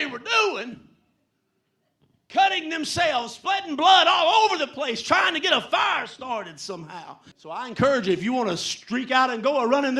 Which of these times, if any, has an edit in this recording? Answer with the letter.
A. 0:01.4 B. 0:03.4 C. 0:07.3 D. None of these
C